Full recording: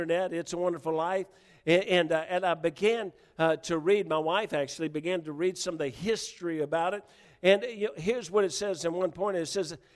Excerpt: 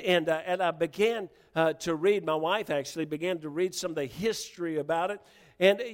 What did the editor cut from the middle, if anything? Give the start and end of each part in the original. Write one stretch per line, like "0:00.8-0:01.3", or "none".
none